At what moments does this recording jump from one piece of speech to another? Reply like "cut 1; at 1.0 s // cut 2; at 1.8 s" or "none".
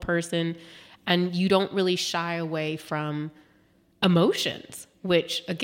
none